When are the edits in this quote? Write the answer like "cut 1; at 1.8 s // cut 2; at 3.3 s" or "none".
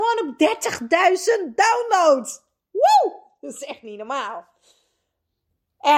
none